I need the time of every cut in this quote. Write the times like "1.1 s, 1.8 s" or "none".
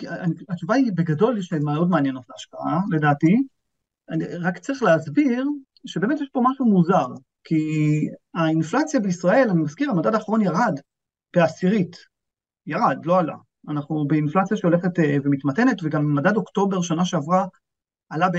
none